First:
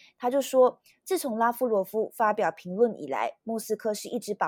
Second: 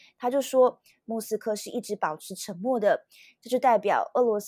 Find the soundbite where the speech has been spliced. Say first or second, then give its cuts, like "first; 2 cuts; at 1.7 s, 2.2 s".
second; 1 cut; at 1.0 s